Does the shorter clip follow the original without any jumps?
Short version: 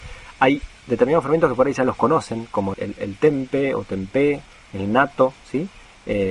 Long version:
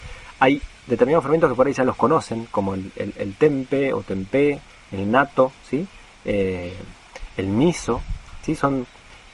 no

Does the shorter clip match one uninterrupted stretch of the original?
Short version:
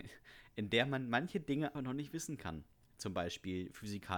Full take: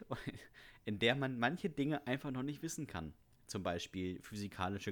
no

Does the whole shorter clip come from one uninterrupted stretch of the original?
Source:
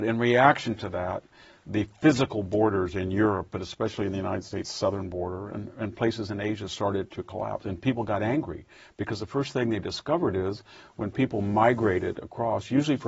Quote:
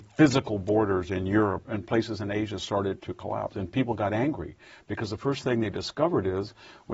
no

